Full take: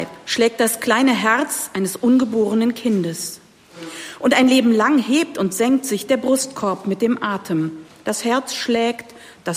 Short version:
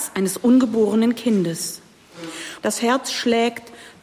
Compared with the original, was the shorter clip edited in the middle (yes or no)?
yes